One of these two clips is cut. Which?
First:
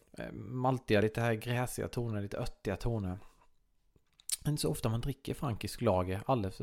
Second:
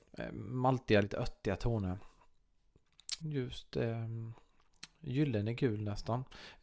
second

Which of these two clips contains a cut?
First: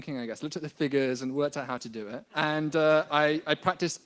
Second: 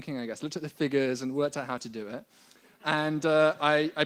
first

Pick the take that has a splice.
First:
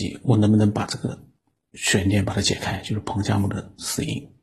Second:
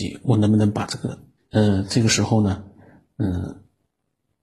second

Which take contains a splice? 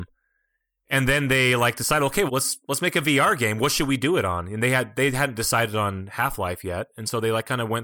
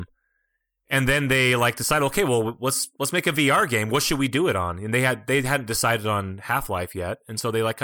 first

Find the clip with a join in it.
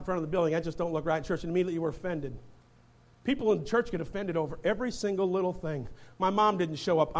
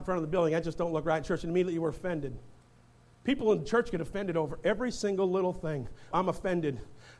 second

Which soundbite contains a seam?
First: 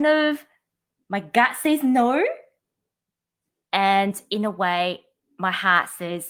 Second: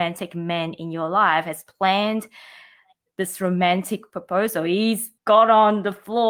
second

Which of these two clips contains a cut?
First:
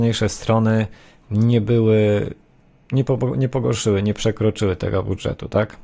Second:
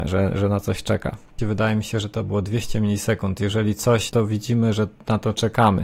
second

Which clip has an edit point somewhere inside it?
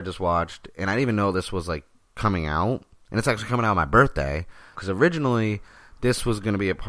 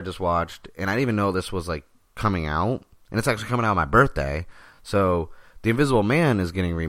first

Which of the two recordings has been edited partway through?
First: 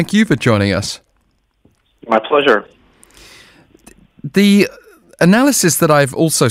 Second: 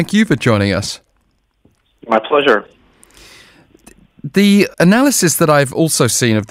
second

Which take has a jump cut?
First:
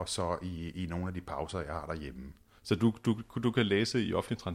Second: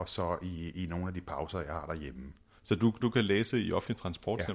second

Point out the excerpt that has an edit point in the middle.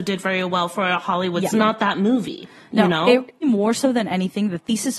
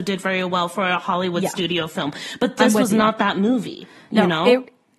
first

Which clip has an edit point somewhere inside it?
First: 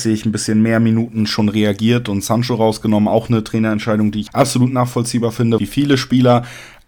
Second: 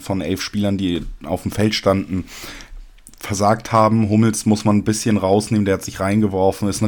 first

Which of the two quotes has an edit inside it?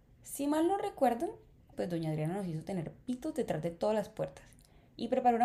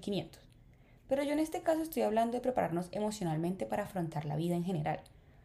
first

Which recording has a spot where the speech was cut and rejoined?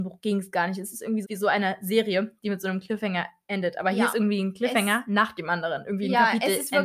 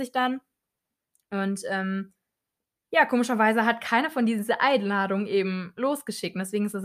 first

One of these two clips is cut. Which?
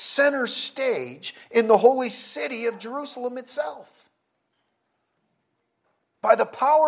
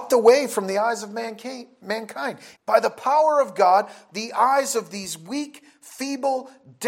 second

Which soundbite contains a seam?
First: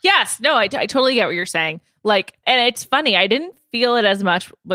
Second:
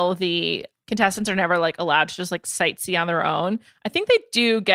first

